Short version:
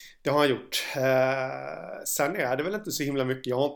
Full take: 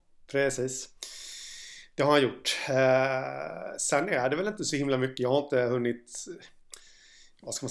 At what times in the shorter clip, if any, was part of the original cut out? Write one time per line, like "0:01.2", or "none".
none